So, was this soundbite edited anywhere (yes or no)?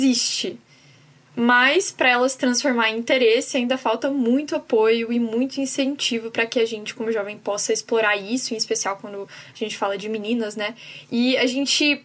no